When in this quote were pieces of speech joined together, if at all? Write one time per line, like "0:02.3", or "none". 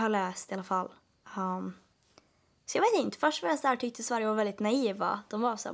none